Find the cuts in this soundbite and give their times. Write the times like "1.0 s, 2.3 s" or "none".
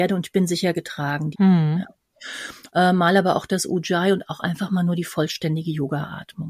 1.3 s, 2.7 s